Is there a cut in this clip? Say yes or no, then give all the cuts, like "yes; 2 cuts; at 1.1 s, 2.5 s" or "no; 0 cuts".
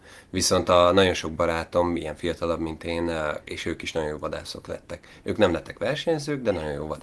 yes; 1 cut; at 3.4 s